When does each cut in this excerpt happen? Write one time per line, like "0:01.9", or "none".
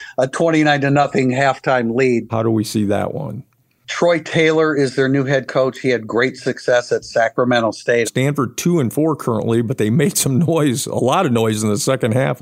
0:02.3
0:08.0

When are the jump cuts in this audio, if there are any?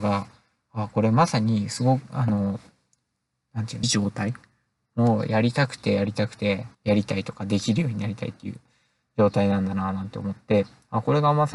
0:03.8
0:06.7

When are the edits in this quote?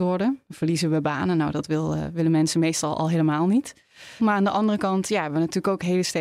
0:04.2

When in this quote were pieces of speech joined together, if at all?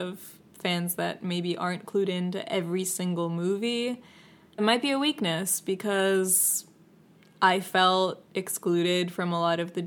0:04.6

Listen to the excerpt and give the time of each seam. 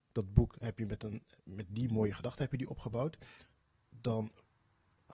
none

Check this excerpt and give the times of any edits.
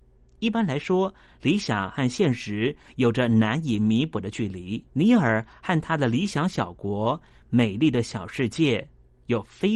0:04.9

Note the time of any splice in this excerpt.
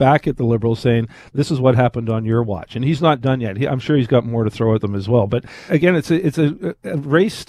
0:05.7

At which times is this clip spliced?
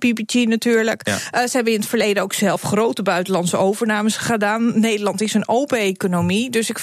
none

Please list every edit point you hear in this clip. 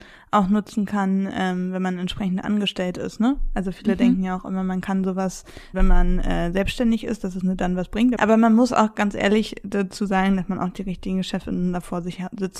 0:05.7
0:08.2

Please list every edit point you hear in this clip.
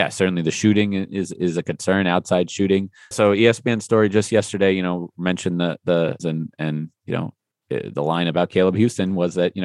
0:03.1
0:06.2

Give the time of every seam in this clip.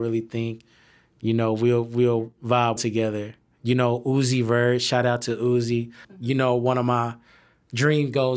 0:02.8
0:06.0

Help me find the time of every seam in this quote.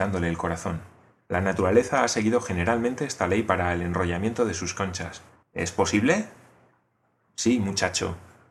0:01.3
0:05.4

